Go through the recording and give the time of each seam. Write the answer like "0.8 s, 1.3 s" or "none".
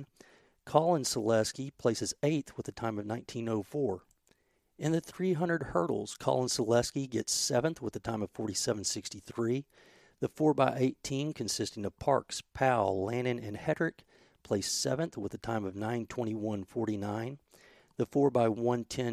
none

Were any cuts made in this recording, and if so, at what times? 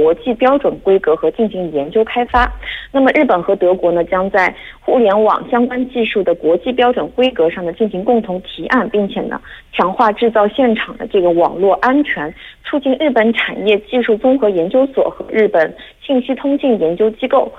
none

